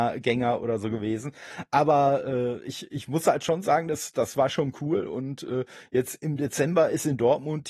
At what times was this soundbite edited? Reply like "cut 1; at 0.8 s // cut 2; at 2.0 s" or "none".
none